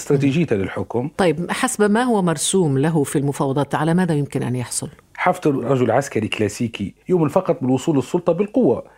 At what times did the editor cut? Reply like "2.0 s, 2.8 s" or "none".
5.1 s, 7.0 s